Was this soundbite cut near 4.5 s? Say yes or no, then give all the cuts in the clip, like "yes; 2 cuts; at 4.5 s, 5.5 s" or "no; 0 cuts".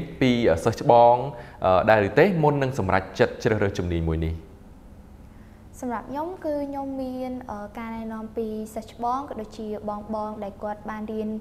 no; 0 cuts